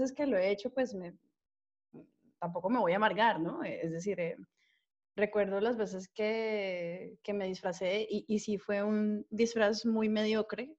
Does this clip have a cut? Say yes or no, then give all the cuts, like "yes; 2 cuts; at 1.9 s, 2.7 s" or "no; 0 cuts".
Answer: no; 0 cuts